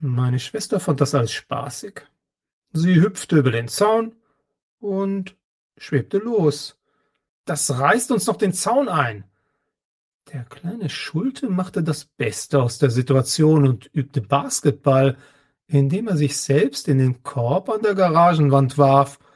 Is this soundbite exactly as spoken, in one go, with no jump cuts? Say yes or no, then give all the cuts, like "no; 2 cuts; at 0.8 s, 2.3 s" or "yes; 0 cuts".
no; 1 cut; at 7.3 s